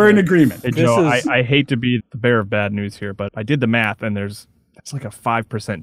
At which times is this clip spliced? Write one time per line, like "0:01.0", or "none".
0:02.0
0:03.3